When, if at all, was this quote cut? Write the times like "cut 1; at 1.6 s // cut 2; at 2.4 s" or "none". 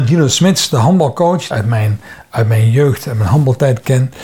cut 1; at 1.5 s